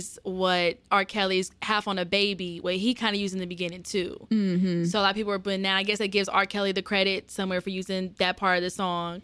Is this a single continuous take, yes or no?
yes